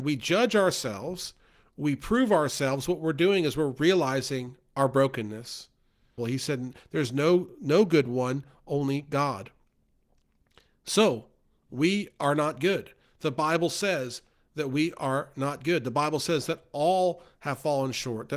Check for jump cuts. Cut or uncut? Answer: cut